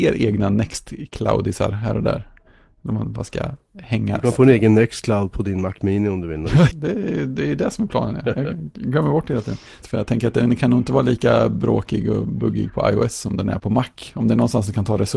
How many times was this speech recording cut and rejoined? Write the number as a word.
three